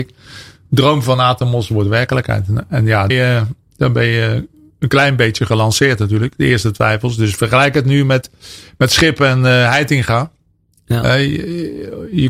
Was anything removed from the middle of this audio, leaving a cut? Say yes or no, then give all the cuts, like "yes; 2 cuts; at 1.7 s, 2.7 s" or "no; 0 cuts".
yes; 1 cut; at 3.1 s